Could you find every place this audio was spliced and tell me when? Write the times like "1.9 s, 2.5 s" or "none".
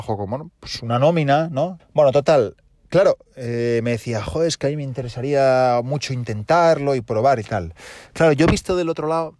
1.8 s